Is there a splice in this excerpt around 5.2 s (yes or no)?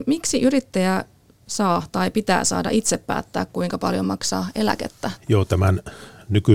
yes